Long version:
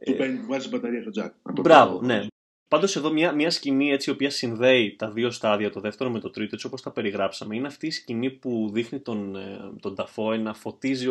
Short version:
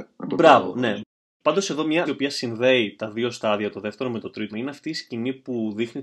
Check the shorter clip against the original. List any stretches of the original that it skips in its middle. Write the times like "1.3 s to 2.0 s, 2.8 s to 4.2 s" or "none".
3.3 s to 4.1 s, 6.5 s to 7.5 s